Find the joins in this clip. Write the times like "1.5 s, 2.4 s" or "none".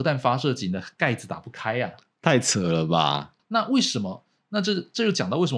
3.4 s